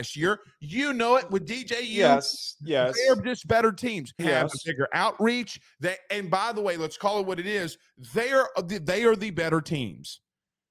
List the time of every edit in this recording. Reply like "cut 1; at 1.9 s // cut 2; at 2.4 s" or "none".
cut 1; at 4.2 s